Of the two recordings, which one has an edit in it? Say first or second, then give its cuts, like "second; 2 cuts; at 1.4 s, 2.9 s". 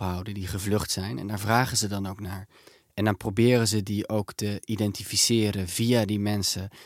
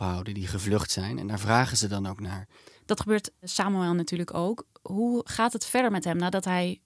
second; 1 cut; at 2.7 s